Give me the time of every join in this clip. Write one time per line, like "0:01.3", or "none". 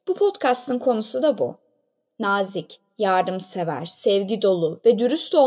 none